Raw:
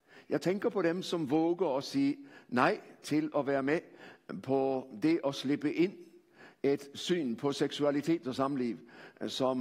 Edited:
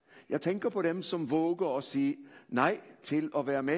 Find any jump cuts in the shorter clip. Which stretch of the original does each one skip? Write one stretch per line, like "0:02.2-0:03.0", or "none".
none